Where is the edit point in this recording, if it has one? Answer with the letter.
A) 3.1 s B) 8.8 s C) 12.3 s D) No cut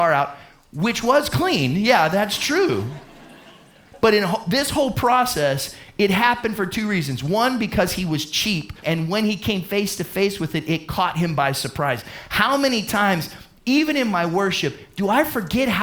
B